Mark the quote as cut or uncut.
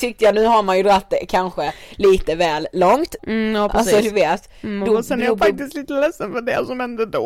cut